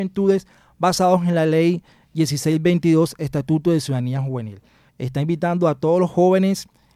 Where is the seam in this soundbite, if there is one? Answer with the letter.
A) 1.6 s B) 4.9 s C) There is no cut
B